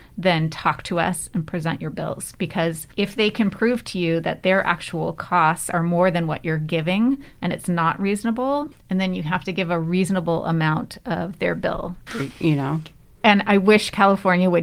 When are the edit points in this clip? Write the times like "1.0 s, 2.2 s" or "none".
2.9 s, 8.7 s, 12.1 s